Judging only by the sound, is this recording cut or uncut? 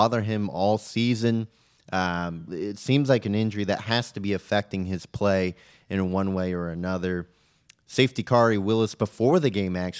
cut